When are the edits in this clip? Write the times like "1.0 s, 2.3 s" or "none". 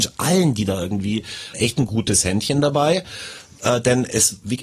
1.5 s